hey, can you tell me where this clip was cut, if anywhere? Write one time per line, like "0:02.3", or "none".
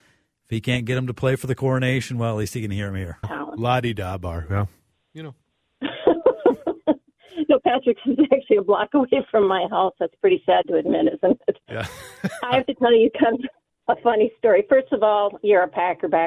0:03.2